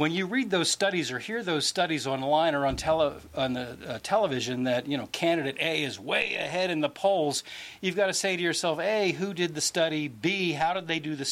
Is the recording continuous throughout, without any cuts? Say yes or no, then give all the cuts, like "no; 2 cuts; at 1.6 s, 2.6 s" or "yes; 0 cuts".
yes; 0 cuts